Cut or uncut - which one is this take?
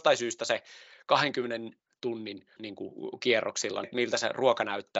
cut